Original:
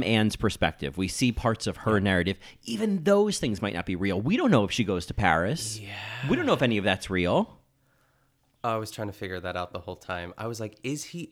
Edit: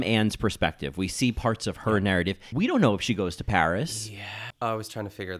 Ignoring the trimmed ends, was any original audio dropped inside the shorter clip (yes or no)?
yes